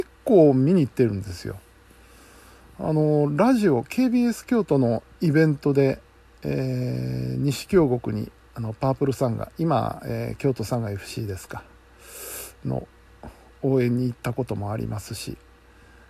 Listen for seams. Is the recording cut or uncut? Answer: uncut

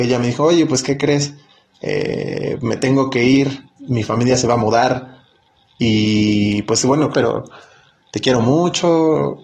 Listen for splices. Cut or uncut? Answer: cut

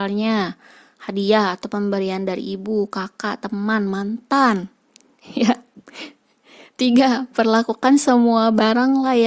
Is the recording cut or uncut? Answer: uncut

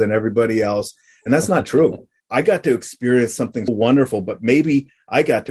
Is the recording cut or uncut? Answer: cut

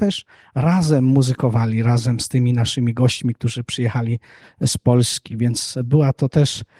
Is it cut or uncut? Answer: uncut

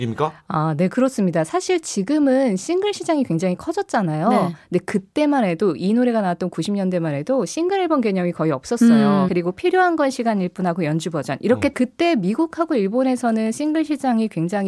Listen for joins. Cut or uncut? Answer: cut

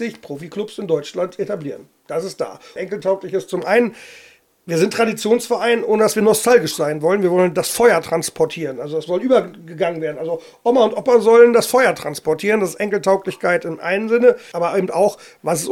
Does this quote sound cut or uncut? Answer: cut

